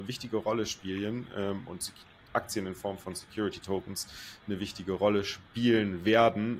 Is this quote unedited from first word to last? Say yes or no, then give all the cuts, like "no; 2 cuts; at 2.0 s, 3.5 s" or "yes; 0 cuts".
yes; 0 cuts